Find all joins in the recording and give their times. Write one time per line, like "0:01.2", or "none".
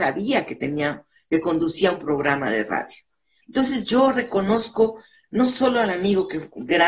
0:03.4